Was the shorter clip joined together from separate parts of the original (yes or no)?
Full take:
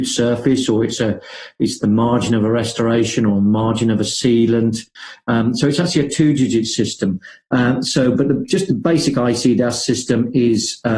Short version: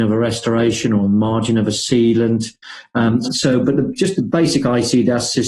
yes